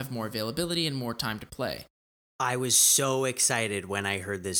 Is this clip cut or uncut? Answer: uncut